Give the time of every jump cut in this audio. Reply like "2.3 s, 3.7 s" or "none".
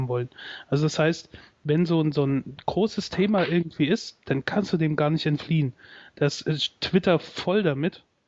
none